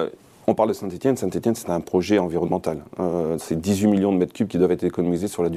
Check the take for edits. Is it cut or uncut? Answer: uncut